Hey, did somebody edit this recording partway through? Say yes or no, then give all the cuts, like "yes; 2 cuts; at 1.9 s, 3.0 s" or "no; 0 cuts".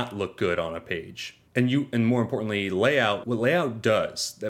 yes; 2 cuts; at 1.5 s, 3.2 s